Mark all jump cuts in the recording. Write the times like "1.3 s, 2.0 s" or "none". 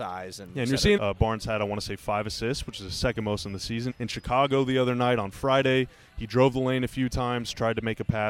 1.0 s, 3.9 s